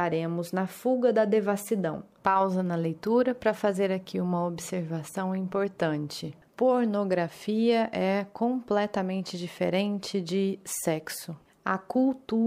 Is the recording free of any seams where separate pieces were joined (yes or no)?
yes